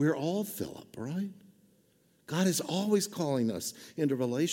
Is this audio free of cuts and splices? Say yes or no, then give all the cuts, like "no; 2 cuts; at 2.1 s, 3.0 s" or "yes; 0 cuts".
yes; 0 cuts